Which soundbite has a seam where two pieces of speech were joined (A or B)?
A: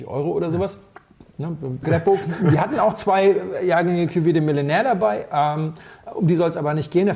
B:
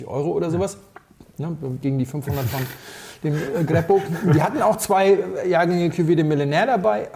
A